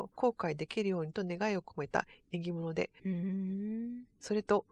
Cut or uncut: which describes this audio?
cut